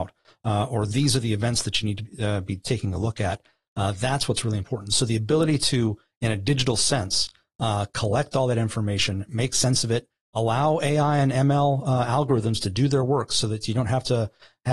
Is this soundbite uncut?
yes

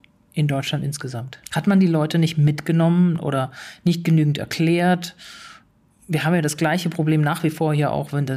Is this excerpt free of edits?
no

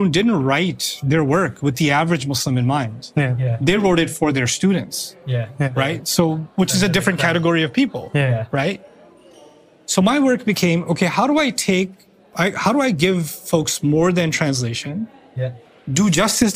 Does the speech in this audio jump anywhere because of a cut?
no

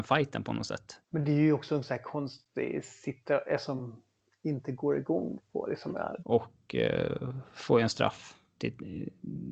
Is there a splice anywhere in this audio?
yes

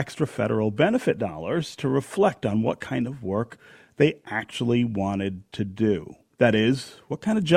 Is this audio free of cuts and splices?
yes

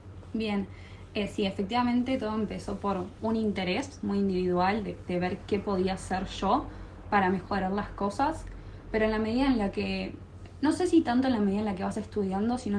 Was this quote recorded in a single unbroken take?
yes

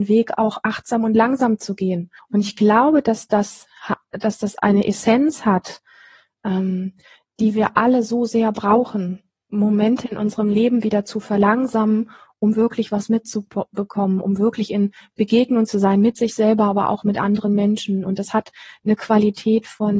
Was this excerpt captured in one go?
no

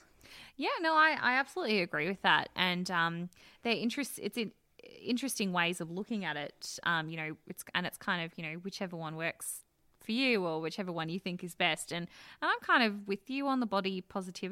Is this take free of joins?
yes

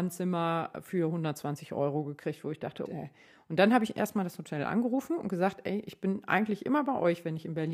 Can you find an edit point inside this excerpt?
yes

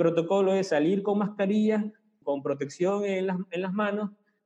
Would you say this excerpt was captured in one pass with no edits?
no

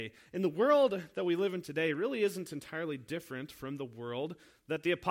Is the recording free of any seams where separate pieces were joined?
yes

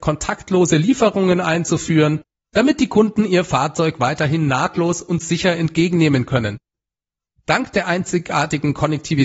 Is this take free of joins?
yes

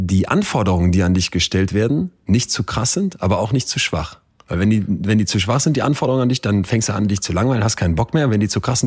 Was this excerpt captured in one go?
yes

